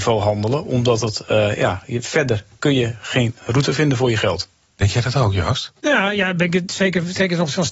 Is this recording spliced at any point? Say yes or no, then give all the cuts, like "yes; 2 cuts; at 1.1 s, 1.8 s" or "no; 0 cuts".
yes; 1 cut; at 5.8 s